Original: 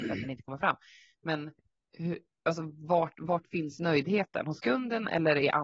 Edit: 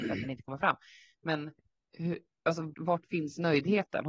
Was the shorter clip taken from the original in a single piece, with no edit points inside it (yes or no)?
no